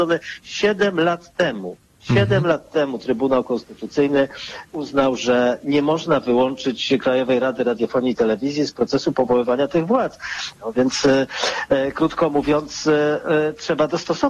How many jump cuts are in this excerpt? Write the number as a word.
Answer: two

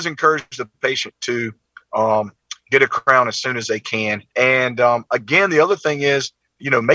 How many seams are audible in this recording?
one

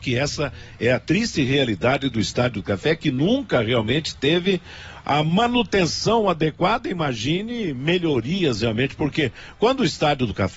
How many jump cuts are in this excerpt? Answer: zero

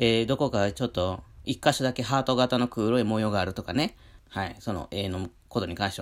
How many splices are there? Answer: one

